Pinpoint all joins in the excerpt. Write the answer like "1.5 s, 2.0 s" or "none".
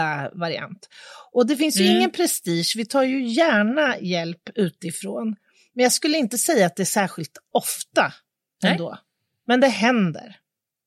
none